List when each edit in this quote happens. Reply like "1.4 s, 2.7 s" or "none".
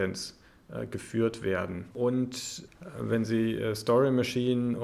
1.9 s